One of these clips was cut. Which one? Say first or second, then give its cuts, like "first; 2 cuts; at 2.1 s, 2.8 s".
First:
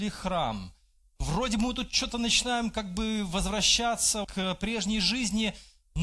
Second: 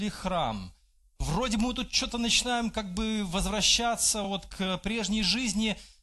first; 1 cut; at 4.2 s